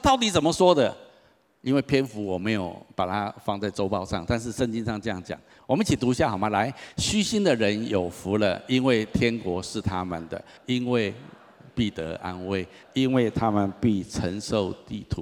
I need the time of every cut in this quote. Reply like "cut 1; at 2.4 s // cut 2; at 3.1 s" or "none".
cut 1; at 10.6 s // cut 2; at 12.8 s